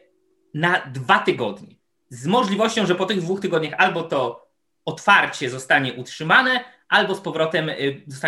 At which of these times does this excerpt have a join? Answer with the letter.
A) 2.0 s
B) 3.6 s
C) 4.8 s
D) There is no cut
A